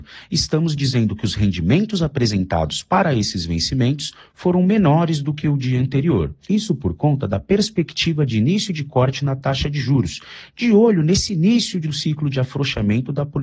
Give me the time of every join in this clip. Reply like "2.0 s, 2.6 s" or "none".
none